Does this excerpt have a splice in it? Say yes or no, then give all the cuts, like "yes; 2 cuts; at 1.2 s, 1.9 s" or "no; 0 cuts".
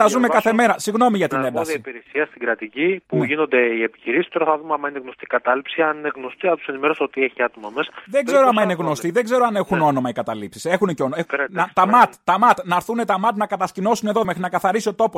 yes; 2 cuts; at 11.3 s, 14.2 s